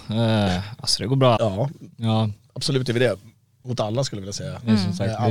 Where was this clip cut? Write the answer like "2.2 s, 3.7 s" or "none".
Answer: 1.4 s